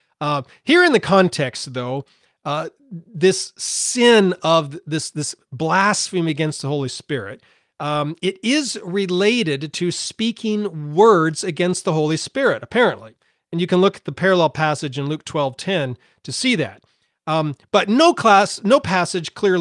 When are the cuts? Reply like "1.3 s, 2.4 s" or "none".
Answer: none